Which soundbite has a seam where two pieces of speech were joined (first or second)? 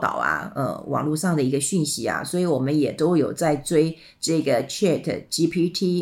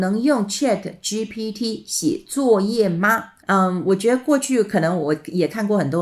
second